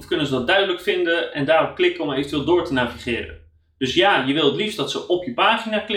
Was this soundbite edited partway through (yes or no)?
no